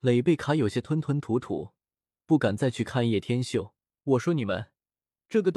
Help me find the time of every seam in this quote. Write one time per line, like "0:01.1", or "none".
0:04.0